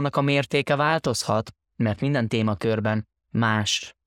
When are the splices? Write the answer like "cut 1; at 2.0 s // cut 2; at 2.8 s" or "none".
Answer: none